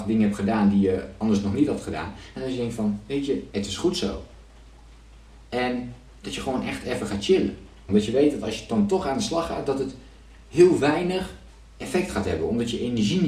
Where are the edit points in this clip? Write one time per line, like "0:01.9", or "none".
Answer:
0:07.9